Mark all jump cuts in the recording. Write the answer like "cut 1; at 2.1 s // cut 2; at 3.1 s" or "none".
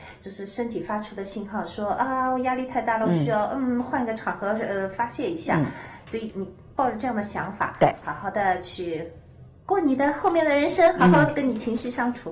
none